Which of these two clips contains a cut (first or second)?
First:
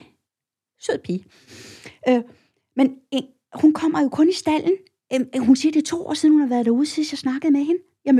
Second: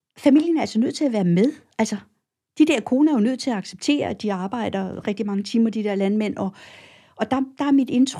second